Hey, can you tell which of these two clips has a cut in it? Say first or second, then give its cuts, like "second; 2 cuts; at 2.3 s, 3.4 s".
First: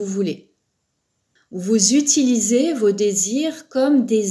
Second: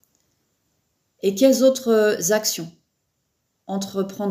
first; 1 cut; at 1.4 s